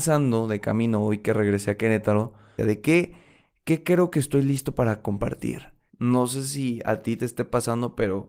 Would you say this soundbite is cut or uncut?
cut